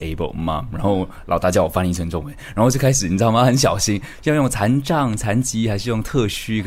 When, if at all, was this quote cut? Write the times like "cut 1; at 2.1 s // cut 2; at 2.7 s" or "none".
none